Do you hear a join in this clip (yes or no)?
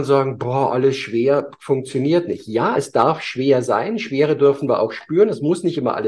no